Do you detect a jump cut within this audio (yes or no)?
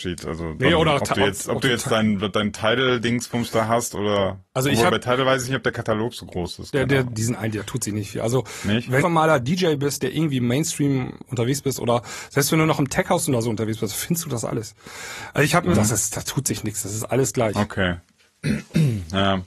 yes